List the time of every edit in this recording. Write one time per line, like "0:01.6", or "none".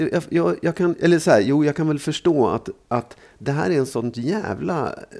none